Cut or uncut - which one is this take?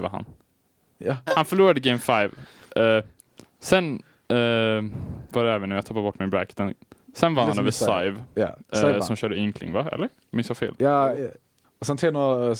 cut